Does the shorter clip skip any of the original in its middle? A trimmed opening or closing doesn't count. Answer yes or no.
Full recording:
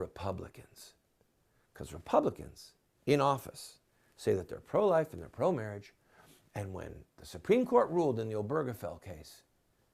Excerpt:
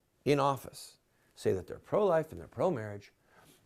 no